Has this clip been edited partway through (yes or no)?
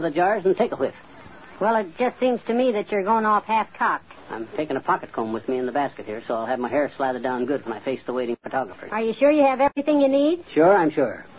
yes